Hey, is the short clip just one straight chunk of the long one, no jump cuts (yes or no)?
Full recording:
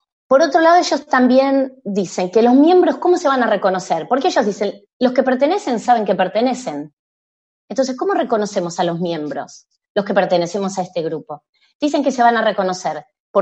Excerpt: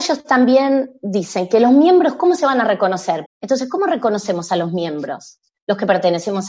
no